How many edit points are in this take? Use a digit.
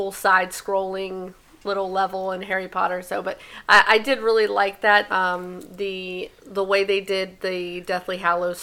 2